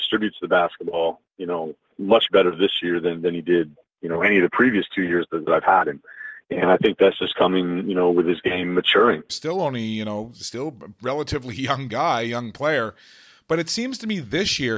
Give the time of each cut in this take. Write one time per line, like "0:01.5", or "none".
0:02.0
0:09.3